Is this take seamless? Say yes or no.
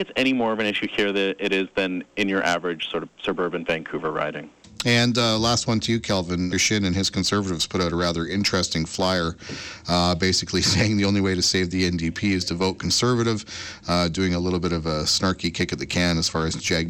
no